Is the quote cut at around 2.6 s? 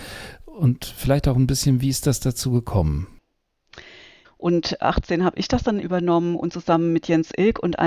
no; 2 cuts; at 4.2 s, 5.8 s

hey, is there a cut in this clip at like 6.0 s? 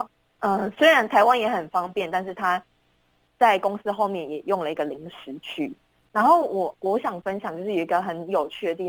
no; 0 cuts

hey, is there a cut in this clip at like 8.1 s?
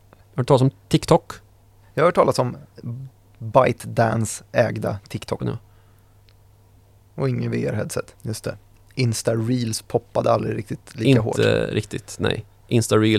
yes; 2 cuts; at 5.4 s, 8.1 s

